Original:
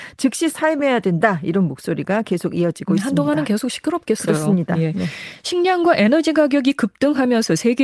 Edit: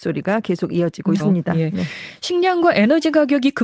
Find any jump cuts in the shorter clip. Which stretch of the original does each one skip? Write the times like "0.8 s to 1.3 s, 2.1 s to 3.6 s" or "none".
3.0 s to 4.4 s